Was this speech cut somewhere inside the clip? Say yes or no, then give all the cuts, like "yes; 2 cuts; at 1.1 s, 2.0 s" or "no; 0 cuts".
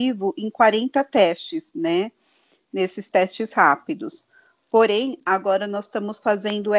no; 0 cuts